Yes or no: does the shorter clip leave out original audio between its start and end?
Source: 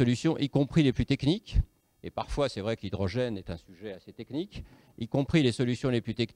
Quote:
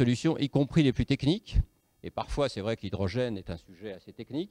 no